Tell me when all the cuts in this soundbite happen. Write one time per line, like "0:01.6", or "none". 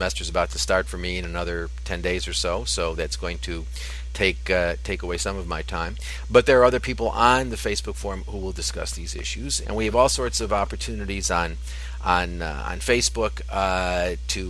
0:09.6